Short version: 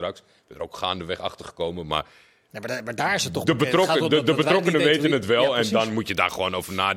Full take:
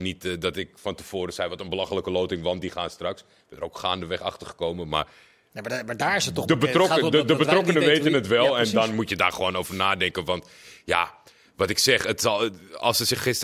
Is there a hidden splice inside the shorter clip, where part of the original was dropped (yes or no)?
no